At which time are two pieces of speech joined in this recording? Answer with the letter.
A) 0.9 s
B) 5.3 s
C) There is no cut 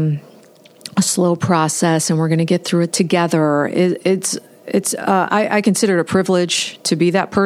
C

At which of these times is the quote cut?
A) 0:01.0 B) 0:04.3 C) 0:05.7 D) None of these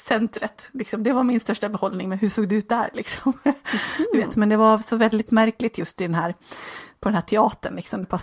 B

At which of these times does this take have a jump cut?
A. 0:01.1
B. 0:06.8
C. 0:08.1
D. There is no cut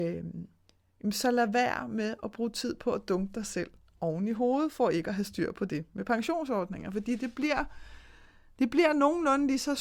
D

